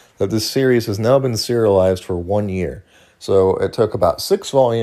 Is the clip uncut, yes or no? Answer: yes